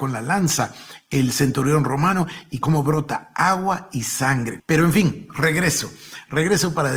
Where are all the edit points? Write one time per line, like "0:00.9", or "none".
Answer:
0:04.6